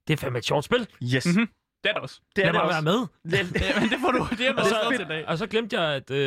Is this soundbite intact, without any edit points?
yes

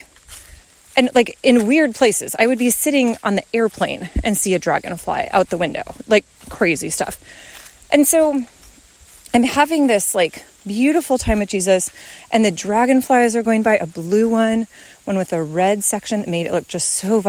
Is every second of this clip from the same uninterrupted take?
yes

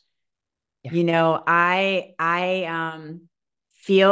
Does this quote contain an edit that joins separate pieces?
no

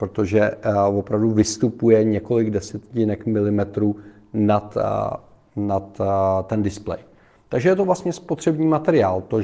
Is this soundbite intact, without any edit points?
no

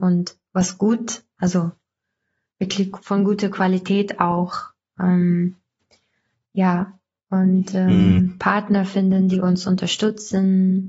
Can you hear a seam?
yes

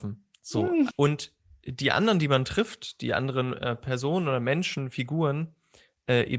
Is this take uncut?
no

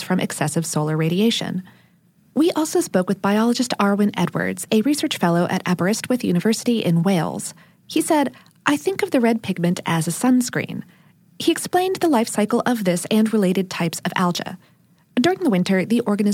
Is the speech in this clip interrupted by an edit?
no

